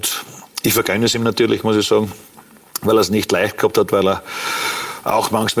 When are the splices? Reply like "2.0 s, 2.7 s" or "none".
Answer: none